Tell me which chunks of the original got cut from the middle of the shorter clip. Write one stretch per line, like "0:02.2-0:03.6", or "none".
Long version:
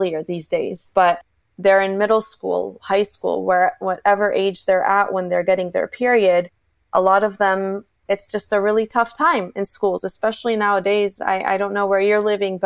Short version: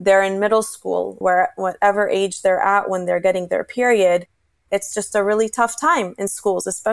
0:02.8-0:03.4
0:06.8-0:07.9